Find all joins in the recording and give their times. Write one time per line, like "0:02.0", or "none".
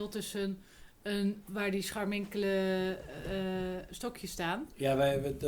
0:01.5